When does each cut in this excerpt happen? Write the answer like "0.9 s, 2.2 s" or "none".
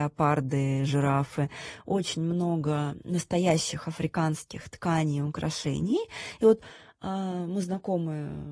none